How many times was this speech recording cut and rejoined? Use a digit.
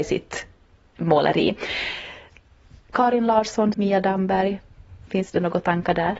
1